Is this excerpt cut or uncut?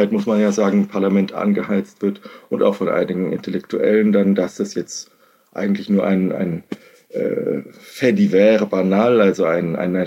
uncut